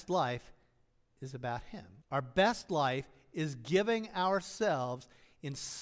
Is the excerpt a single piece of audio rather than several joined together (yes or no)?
no